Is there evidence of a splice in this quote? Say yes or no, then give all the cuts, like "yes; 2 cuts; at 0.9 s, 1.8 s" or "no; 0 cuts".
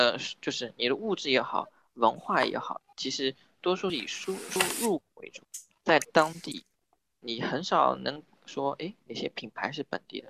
no; 0 cuts